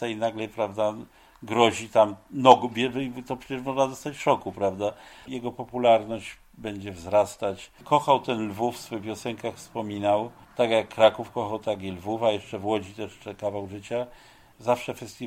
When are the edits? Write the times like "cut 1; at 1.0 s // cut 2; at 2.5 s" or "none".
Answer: cut 1; at 5.3 s